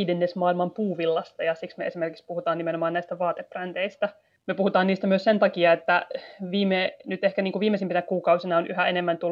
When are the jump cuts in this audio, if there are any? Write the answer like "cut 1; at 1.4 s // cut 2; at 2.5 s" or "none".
none